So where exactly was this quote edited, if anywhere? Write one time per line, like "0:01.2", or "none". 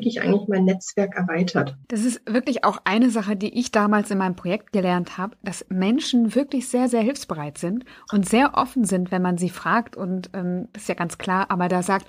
0:01.8
0:10.7